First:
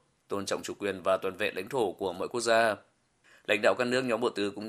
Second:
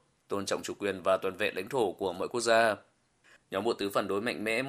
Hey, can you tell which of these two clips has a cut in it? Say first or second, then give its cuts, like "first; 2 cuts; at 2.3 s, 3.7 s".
second; 1 cut; at 3.4 s